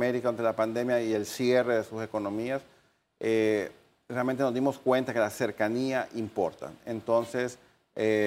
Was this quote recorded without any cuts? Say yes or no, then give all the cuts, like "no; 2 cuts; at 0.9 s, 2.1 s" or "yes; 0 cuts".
yes; 0 cuts